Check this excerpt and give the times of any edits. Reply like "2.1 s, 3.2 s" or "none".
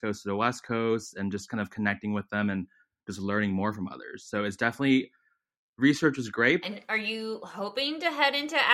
6.6 s